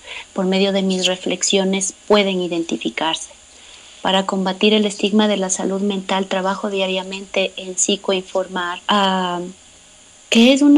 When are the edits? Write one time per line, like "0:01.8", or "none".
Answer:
0:08.8